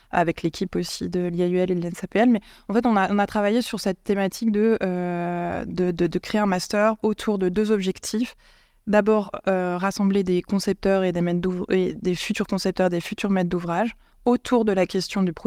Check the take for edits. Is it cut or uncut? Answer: uncut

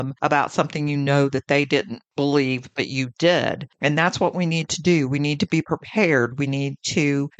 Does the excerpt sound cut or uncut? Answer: cut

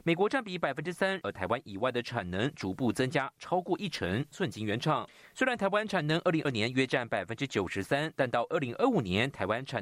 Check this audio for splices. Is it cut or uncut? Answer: cut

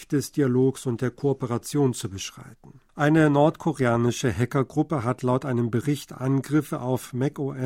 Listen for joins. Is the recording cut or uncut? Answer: cut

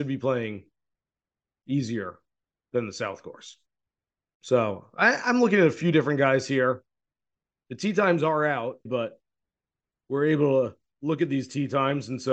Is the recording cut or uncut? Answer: cut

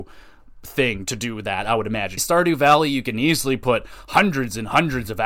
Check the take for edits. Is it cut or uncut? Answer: cut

